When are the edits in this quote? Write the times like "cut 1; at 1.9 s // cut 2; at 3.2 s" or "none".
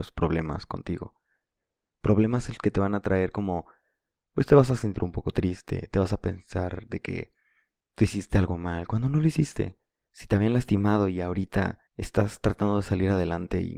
cut 1; at 10.0 s // cut 2; at 11.9 s